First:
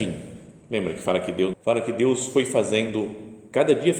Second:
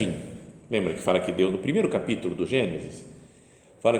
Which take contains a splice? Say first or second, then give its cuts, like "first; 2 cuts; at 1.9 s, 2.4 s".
first; 1 cut; at 1.5 s